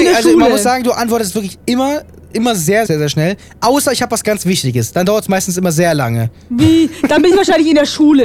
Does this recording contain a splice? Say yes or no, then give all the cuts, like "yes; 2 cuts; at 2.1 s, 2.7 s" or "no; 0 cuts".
yes; 1 cut; at 2.9 s